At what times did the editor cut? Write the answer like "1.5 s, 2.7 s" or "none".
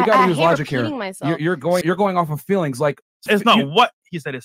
1.8 s, 3.3 s